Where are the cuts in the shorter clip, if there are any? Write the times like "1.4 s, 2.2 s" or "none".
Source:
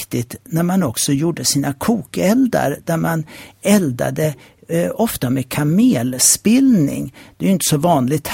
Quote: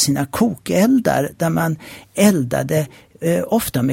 none